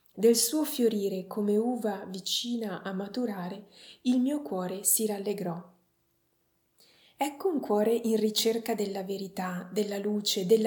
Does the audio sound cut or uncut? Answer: uncut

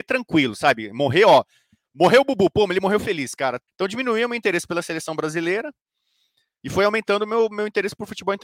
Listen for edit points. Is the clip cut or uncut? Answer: cut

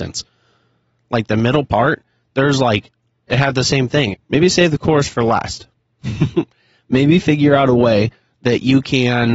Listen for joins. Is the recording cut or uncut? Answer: cut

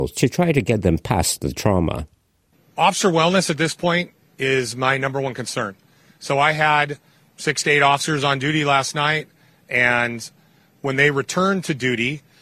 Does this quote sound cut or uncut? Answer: uncut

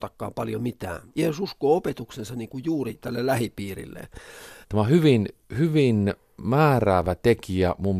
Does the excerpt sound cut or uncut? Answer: cut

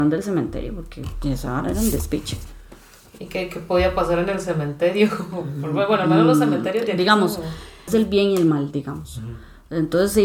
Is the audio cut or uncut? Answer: cut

